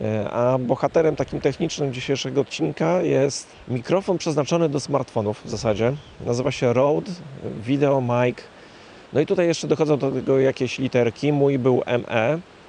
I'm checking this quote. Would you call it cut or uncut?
uncut